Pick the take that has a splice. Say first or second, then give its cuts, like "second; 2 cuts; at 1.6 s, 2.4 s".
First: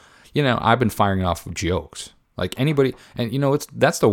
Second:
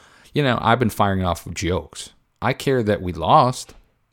second; 1 cut; at 2.3 s